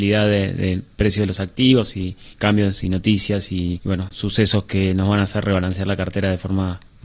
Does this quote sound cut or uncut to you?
cut